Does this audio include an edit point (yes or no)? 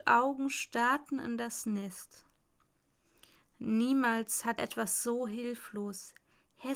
yes